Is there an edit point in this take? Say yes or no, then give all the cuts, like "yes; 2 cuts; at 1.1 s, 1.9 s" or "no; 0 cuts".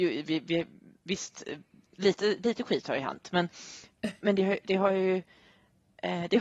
no; 0 cuts